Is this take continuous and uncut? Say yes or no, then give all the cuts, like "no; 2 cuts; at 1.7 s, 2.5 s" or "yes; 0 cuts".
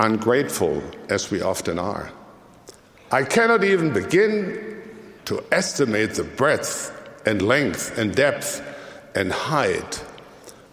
no; 2 cuts; at 3.0 s, 5.2 s